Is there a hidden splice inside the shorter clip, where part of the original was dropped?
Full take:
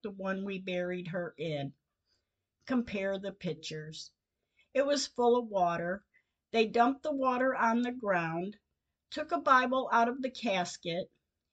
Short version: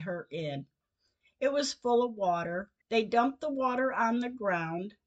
yes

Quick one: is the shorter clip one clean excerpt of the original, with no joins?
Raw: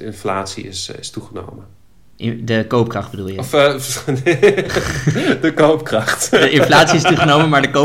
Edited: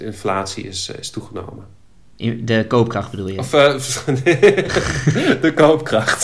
yes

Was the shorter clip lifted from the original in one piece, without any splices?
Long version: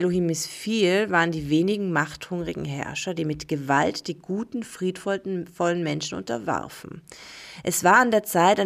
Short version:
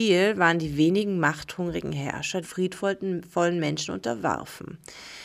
no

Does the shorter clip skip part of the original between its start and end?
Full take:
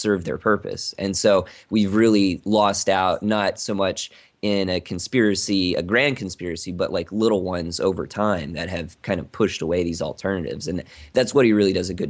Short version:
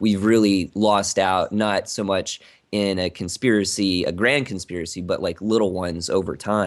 no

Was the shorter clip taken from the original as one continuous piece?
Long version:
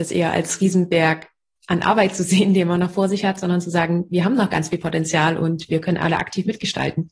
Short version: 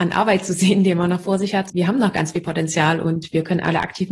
no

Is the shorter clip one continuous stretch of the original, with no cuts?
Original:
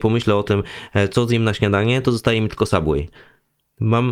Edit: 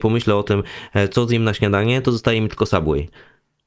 yes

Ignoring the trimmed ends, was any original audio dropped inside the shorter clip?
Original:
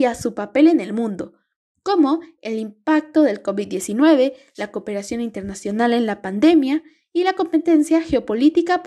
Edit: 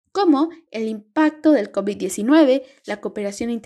no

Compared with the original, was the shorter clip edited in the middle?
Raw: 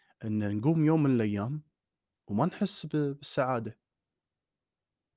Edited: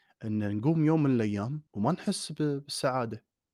yes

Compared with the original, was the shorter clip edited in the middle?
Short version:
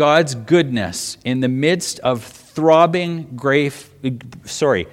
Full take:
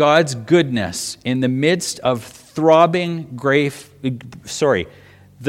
no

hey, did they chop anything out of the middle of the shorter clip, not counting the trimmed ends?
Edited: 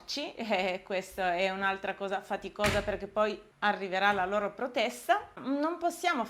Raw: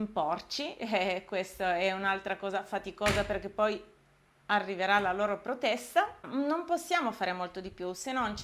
yes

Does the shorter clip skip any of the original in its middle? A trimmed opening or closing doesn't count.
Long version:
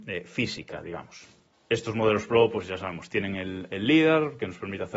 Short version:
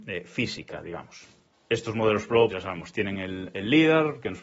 yes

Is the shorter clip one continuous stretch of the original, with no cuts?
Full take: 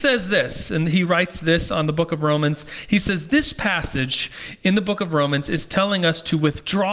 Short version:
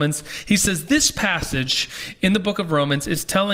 yes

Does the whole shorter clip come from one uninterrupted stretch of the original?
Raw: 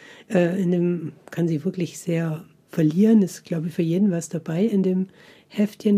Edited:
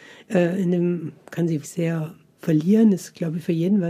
no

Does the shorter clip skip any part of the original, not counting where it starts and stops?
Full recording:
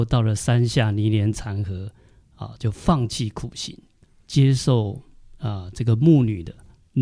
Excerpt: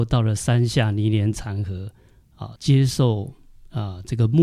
yes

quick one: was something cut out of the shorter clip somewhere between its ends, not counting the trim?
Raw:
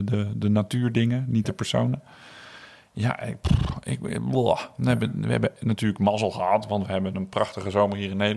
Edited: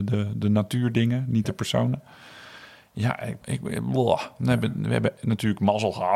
yes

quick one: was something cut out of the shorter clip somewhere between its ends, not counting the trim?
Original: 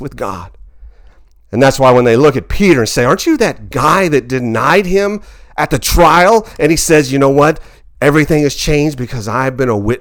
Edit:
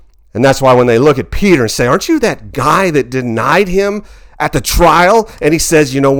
no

